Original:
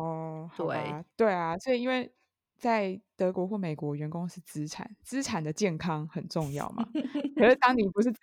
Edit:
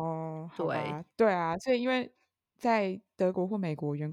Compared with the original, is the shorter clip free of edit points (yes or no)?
yes